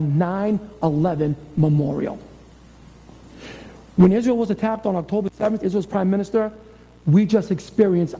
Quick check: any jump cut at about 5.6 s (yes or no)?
yes